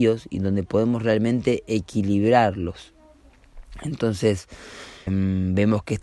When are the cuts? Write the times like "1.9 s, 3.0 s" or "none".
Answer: 5.1 s